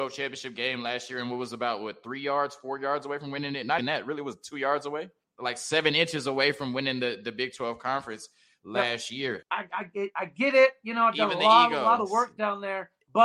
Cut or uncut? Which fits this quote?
cut